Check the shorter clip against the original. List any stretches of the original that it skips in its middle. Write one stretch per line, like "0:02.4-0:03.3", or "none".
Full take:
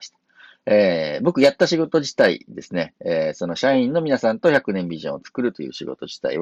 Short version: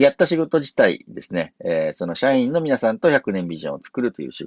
none